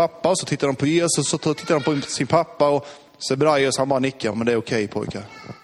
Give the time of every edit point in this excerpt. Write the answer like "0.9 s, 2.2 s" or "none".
none